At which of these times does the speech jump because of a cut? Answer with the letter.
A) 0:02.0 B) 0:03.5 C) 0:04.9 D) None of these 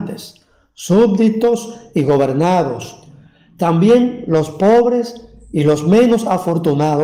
D